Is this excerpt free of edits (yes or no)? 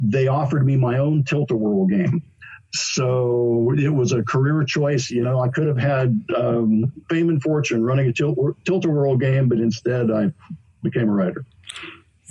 yes